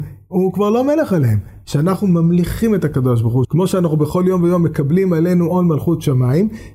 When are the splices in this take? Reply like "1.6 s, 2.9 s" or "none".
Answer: 1.6 s, 3.4 s